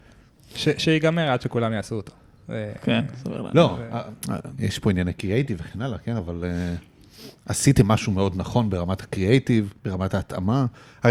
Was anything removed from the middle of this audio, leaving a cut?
yes; 2 cuts; at 4.6 s, 9.8 s

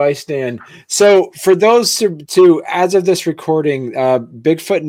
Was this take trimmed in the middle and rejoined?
no; 0 cuts

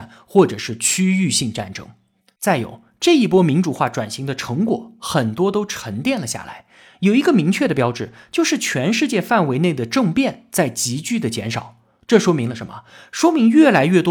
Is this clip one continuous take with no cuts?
yes; 0 cuts

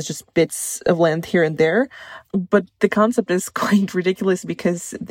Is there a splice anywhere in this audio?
no; 0 cuts

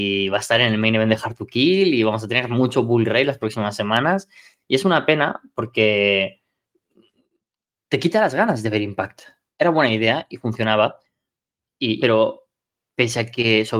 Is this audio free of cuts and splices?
no; 2 cuts; at 9.5 s, 12.0 s

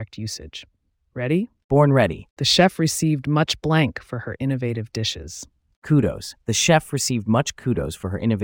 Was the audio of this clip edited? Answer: no; 0 cuts

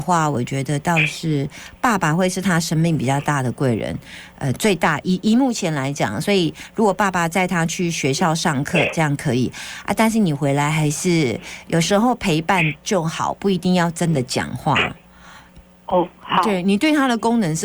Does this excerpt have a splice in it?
no; 0 cuts

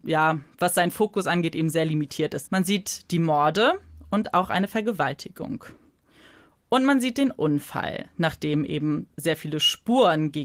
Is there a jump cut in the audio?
yes; 1 cut; at 2.4 s

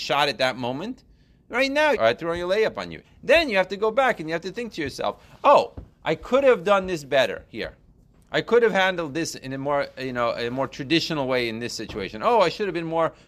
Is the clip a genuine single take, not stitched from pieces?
no; 2 cuts; at 1.9 s, 3.0 s

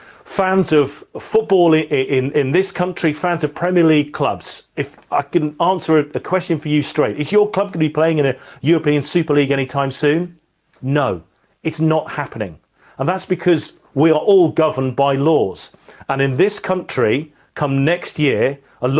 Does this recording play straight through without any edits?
yes; 0 cuts

